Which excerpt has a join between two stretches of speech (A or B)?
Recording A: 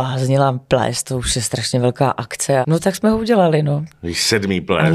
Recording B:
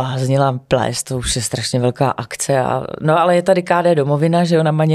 A